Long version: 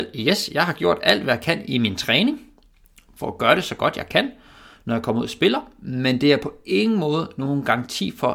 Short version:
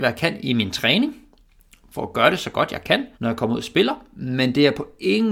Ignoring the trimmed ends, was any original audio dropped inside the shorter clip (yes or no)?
yes